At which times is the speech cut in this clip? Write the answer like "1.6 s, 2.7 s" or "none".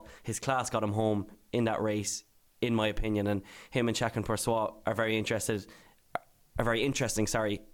none